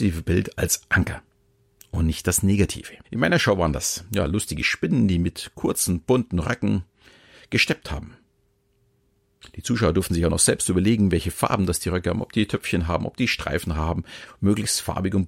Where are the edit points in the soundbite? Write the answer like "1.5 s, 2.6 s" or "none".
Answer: 3.0 s